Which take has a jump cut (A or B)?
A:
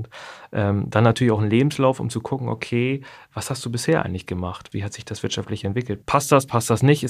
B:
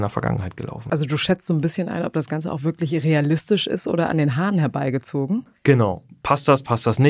A